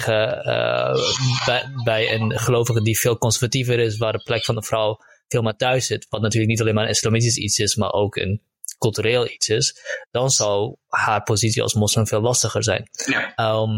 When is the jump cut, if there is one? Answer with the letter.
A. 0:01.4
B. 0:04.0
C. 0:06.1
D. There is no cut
D